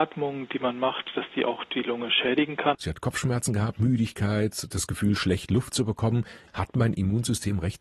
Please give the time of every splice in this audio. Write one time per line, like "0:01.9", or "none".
0:02.7
0:06.5